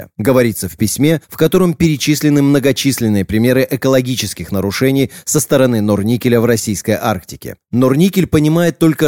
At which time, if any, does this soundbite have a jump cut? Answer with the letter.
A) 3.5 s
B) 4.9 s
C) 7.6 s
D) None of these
C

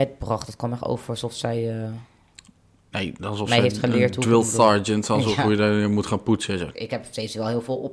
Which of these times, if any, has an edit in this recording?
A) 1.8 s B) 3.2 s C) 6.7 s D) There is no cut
C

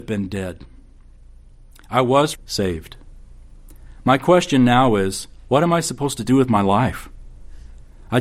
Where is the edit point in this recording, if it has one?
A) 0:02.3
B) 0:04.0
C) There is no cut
A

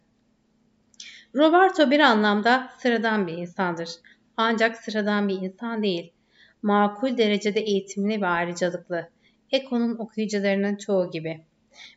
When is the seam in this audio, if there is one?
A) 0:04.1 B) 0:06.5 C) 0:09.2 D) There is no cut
D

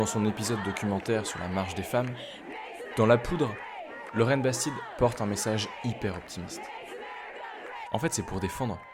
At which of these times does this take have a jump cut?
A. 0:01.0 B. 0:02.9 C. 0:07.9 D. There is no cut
C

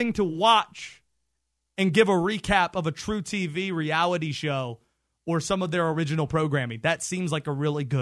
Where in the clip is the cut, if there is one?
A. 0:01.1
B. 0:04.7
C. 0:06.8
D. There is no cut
D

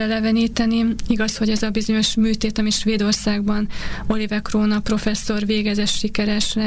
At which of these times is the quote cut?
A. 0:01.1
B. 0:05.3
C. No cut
A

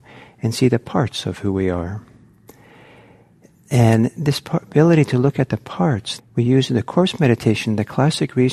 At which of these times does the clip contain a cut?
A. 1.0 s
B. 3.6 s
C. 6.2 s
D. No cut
C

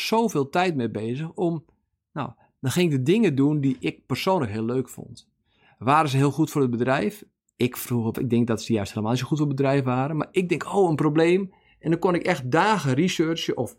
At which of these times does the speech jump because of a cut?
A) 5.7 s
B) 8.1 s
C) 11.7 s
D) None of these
B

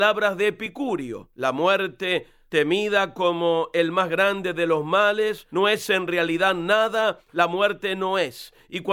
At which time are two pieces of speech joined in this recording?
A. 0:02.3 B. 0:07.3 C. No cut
B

